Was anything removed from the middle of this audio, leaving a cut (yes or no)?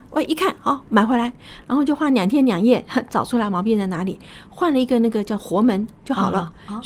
no